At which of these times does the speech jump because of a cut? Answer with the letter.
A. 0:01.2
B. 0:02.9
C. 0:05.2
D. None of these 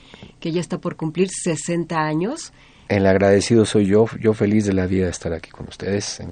B